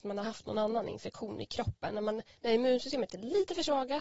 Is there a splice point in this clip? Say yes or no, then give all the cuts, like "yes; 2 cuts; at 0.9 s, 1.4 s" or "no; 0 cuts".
no; 0 cuts